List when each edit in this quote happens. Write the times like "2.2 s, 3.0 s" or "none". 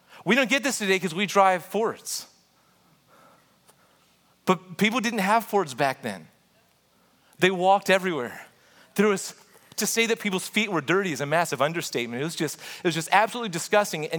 none